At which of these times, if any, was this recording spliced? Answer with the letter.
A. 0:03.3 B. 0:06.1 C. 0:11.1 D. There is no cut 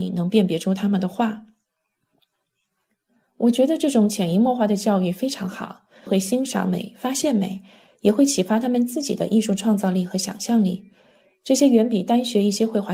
B